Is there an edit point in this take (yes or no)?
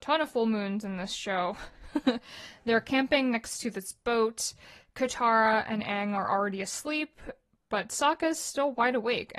no